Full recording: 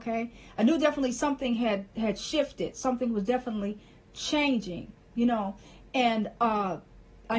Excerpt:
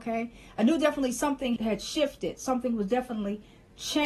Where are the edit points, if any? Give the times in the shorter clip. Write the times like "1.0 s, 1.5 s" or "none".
1.6 s